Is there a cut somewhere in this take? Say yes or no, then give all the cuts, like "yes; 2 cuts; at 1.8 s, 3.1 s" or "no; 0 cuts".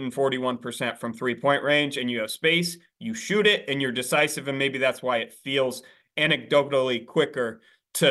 no; 0 cuts